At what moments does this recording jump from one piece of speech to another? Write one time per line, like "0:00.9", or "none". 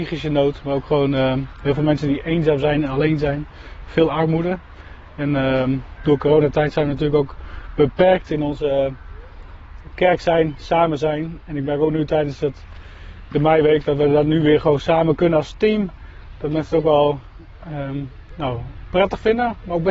0:06.0